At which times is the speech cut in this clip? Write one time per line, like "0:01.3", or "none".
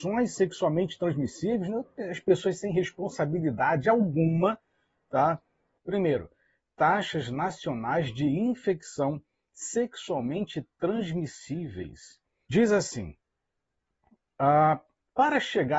0:05.8
0:12.4